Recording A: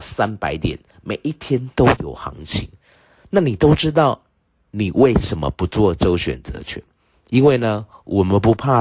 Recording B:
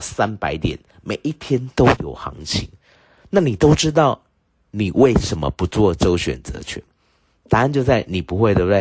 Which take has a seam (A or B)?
A